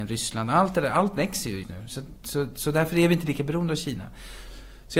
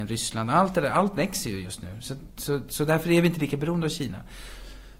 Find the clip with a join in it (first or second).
first